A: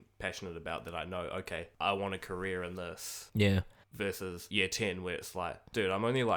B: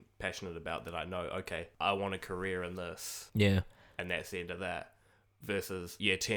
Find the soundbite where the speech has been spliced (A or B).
A